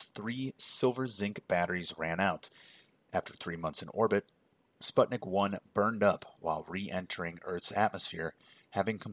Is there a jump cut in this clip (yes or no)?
no